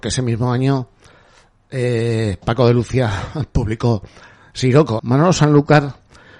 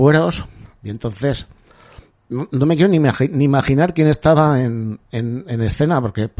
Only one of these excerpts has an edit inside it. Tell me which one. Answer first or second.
first